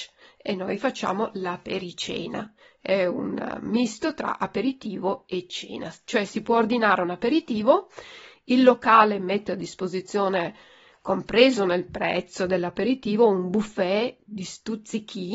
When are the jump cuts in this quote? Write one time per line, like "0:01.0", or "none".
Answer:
none